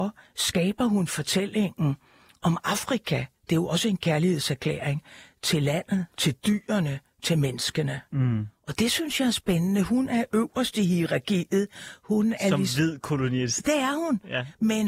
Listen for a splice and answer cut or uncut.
uncut